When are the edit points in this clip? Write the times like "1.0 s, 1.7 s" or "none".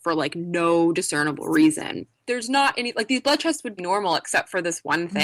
3.8 s